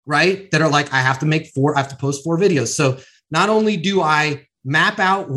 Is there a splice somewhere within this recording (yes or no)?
no